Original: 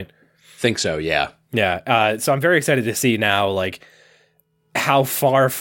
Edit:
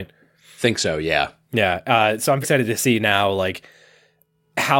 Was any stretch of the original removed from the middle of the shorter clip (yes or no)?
yes